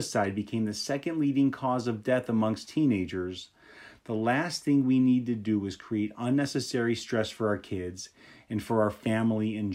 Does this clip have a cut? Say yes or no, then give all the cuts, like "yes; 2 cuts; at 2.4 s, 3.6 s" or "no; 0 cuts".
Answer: no; 0 cuts